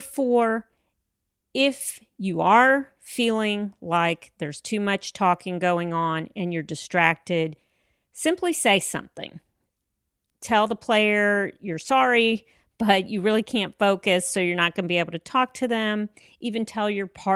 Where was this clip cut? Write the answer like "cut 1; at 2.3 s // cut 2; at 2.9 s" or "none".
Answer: none